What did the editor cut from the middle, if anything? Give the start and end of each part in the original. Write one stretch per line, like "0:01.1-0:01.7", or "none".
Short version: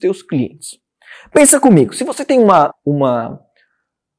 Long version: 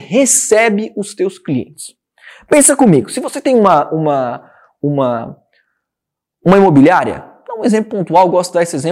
0:03.9-0:04.7